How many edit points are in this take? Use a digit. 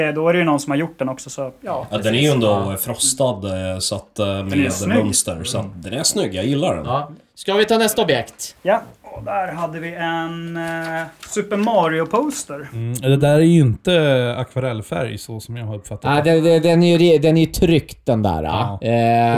0